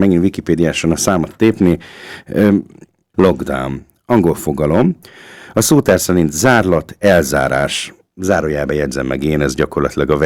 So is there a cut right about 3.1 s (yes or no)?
yes